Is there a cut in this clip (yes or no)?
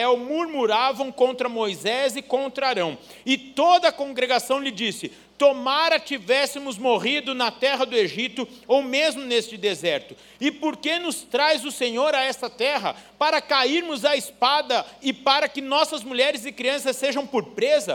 no